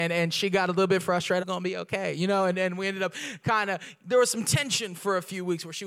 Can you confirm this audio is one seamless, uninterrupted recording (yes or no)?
no